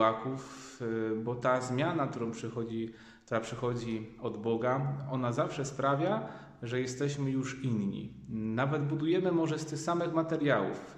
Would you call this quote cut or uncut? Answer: uncut